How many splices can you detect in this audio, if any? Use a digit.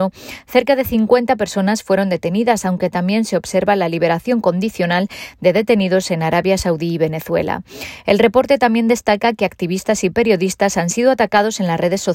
0